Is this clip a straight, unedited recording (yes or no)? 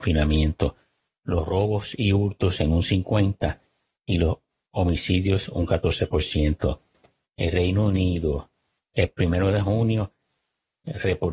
yes